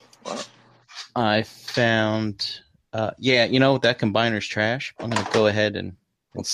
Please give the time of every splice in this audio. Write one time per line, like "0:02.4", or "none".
0:05.0